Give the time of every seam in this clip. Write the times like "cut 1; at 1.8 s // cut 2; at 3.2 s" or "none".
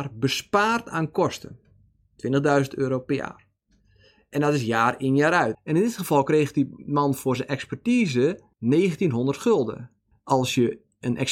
cut 1; at 5.5 s // cut 2; at 8.5 s // cut 3; at 10.1 s